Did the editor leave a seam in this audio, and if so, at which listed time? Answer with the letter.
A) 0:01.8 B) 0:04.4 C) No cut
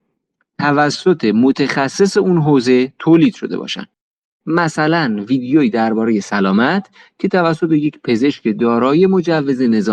C